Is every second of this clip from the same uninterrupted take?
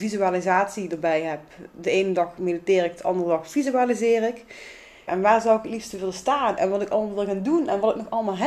no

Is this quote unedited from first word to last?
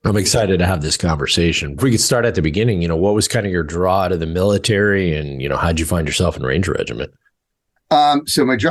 no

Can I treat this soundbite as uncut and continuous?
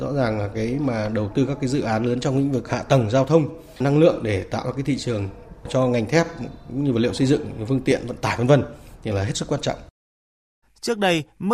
no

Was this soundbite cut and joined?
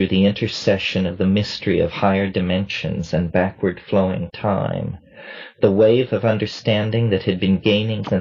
no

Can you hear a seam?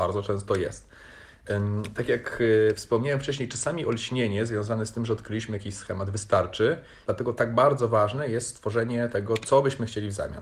yes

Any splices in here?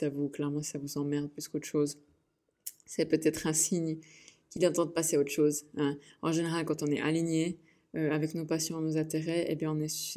no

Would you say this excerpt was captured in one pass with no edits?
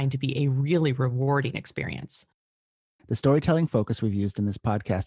yes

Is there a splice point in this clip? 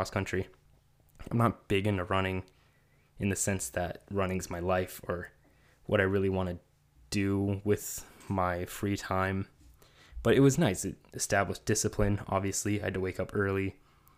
no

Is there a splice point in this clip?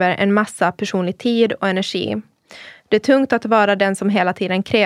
no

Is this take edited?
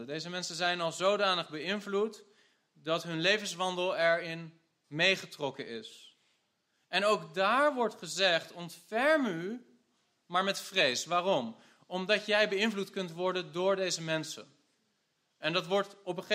no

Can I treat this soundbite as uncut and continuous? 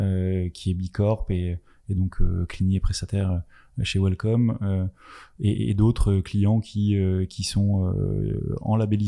yes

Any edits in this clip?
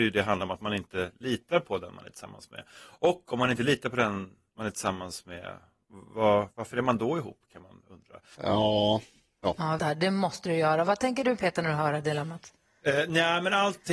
yes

